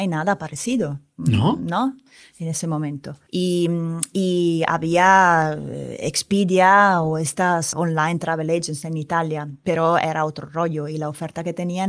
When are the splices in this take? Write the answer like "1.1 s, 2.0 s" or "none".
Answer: 3.3 s, 7.7 s